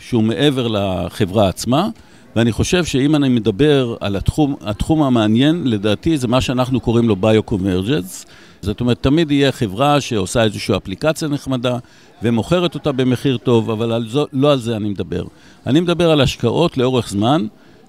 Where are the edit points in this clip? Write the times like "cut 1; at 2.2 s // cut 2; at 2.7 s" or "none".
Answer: cut 1; at 8.6 s